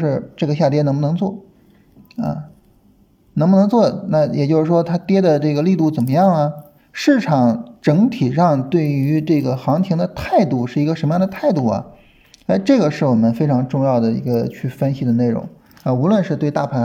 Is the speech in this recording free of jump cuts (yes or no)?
no